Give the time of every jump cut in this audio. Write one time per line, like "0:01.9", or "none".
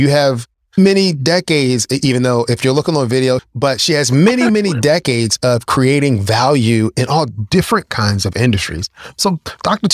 0:03.4

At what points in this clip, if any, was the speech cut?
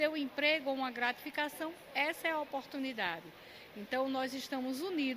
none

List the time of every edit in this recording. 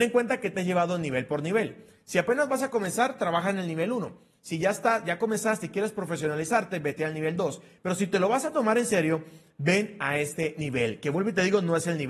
none

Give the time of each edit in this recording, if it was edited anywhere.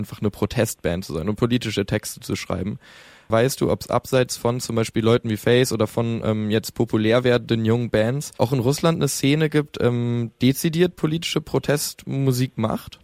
0:08.3
0:10.4

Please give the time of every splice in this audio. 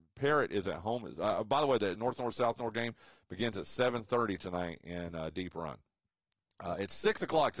none

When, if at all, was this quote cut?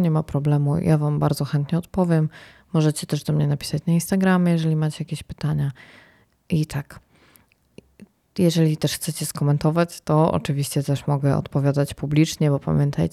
none

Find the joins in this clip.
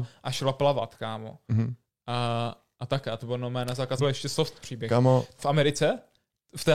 0:04.0
0:05.4

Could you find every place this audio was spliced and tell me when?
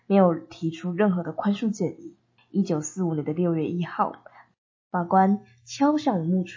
none

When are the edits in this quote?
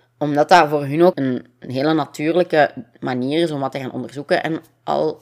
0:01.1

